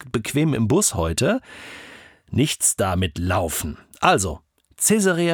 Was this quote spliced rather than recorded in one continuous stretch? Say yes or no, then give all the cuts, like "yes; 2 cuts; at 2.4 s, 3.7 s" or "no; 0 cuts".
no; 0 cuts